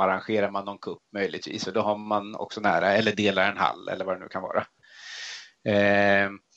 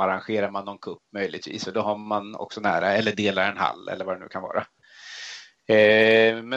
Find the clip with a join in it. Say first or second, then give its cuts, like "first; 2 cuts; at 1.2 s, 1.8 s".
second; 1 cut; at 5.6 s